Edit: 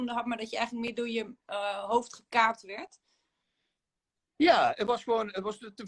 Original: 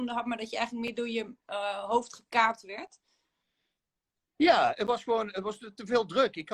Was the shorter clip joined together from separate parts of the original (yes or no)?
no